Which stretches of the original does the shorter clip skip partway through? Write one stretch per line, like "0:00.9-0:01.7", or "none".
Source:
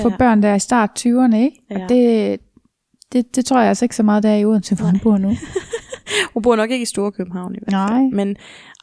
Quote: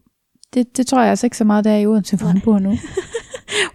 none